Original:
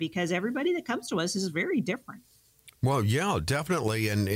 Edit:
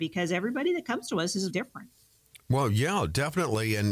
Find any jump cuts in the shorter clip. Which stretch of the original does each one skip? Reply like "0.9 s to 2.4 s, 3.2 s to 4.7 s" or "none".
1.5 s to 1.8 s

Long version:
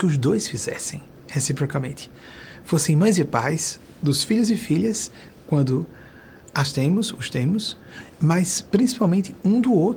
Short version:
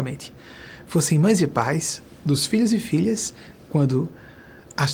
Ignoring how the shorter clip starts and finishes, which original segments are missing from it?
none

